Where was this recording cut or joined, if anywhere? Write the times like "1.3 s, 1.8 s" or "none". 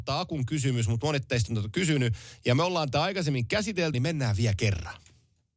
3.9 s